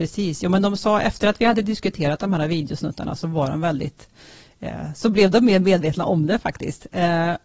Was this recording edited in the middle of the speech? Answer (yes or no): no